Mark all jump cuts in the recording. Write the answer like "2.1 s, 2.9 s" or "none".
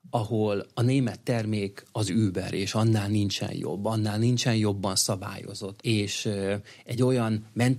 2.1 s, 5.8 s

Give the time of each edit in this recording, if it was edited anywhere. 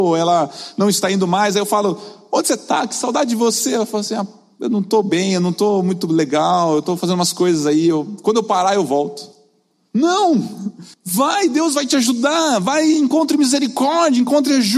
10.9 s

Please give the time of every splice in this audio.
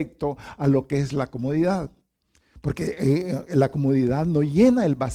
2.4 s

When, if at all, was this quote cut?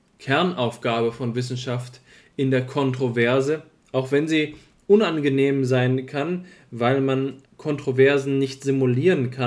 7.4 s

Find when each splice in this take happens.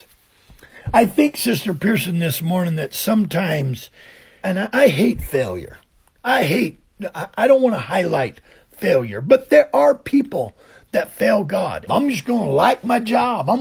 4.4 s, 11.9 s

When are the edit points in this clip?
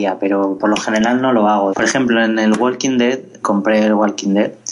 1.7 s, 3.4 s

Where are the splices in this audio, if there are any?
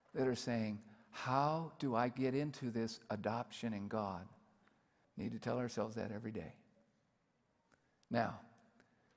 5.0 s

